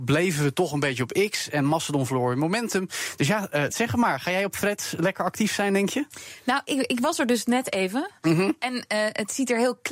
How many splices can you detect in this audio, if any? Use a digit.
1